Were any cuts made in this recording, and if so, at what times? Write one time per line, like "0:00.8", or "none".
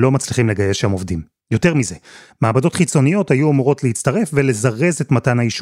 0:01.4